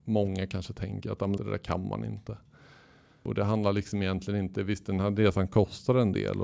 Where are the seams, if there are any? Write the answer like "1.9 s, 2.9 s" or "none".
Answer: 1.4 s